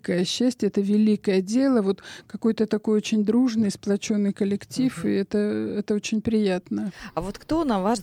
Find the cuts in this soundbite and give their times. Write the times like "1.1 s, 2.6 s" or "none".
none